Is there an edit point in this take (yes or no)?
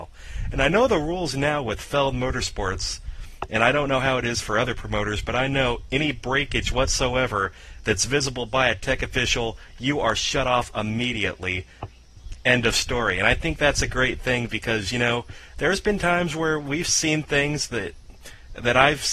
no